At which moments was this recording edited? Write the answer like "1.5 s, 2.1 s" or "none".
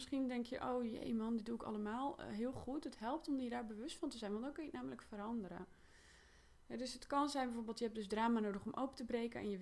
none